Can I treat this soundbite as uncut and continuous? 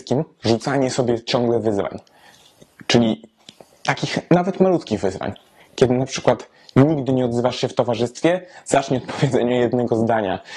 yes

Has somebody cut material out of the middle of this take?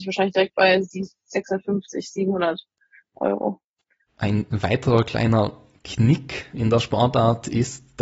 yes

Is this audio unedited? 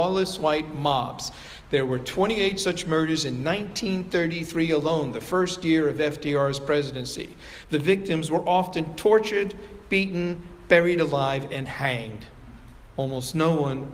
yes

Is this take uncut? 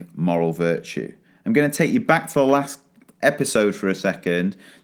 yes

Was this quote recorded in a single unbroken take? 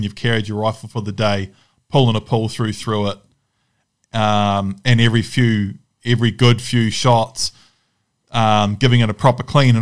yes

